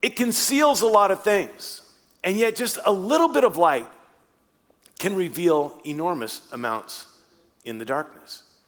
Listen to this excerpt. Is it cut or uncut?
uncut